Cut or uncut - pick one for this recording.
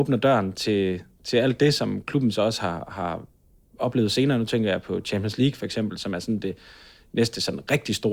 uncut